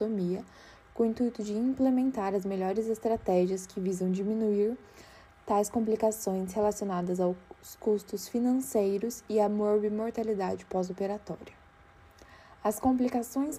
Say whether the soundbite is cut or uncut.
uncut